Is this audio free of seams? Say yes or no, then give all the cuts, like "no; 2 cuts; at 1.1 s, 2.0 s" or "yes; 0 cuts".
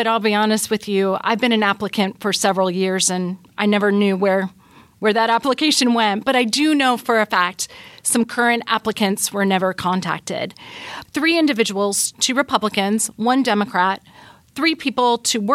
no; 2 cuts; at 11.0 s, 12.1 s